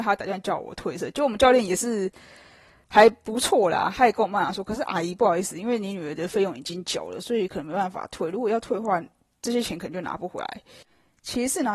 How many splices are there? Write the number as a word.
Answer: zero